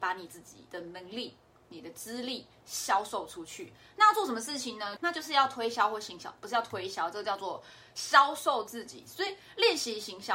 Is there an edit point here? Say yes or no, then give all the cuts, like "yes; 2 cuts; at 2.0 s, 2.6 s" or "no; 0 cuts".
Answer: yes; 1 cut; at 5.0 s